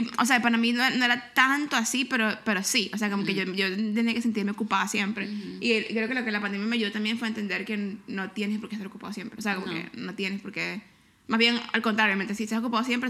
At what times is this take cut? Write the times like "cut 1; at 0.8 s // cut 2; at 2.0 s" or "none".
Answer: none